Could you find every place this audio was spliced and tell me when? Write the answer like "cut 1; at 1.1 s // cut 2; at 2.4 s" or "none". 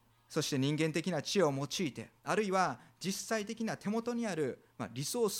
cut 1; at 2.2 s